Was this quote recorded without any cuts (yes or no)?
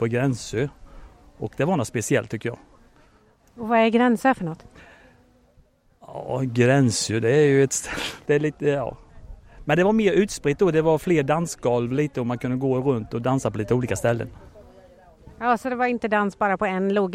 no